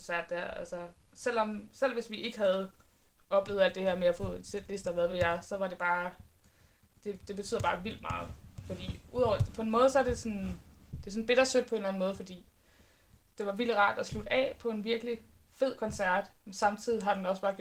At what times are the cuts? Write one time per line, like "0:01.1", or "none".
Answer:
none

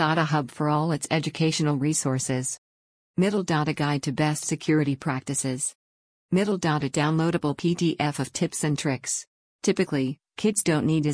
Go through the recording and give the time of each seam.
0:09.6

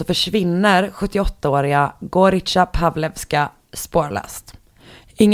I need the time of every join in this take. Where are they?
none

